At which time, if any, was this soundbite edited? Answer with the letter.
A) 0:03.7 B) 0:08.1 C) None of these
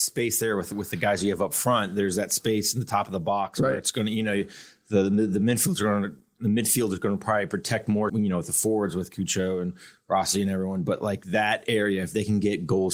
B